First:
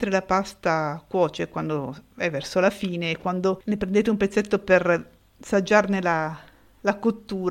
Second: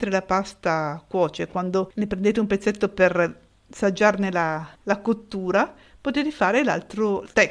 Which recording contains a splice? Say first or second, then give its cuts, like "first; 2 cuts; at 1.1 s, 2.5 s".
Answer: second; 2 cuts; at 1.5 s, 4.7 s